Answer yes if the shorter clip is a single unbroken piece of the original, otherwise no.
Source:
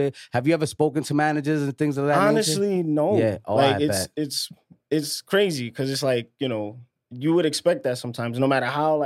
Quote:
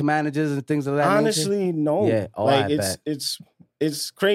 yes